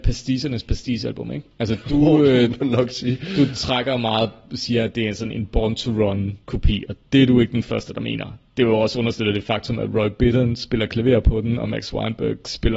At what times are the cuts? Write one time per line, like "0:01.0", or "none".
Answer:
none